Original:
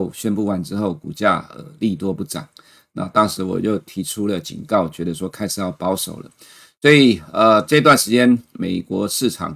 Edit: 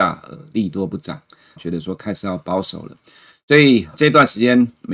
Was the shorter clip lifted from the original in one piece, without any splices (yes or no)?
no